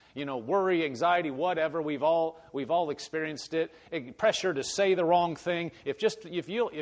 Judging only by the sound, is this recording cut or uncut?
uncut